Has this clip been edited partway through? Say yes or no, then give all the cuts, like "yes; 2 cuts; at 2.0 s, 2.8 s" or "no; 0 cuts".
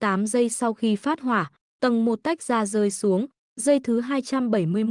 no; 0 cuts